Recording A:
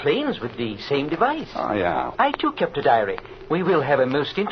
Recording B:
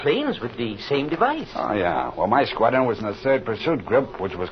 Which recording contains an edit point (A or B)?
A